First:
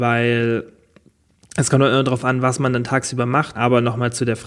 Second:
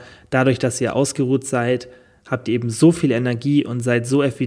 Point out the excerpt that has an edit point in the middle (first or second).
first